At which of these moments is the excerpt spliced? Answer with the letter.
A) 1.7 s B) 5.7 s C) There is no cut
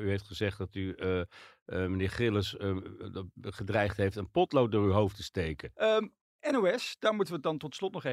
B